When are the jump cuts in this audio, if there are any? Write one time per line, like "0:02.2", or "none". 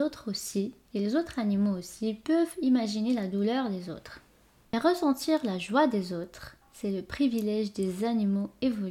0:06.6